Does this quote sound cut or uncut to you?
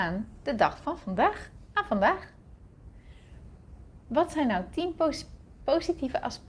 uncut